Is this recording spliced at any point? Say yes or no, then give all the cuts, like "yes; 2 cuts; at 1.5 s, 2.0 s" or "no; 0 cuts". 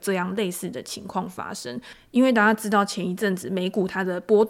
no; 0 cuts